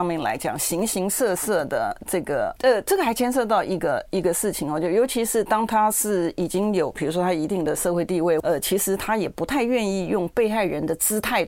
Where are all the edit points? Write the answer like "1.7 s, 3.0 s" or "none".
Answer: 2.6 s, 8.4 s